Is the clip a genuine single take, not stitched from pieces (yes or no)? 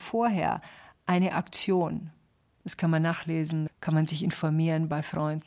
no